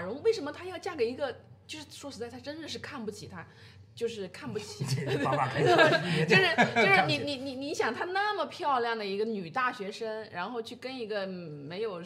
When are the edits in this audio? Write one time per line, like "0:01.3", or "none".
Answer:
none